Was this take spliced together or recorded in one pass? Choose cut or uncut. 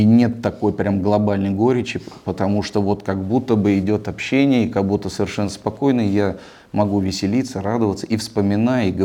uncut